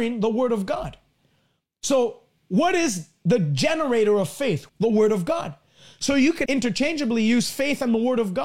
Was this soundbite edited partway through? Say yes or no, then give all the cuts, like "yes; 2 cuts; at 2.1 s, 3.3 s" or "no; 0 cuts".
yes; 2 cuts; at 4.7 s, 6.5 s